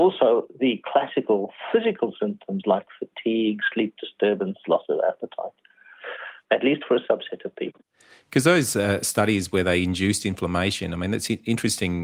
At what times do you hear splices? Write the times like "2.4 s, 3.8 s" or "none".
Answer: 6.4 s